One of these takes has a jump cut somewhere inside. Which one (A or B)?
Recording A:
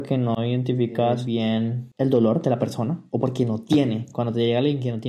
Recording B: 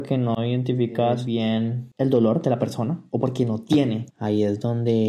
B